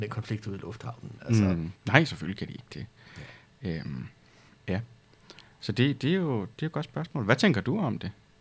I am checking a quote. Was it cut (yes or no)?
yes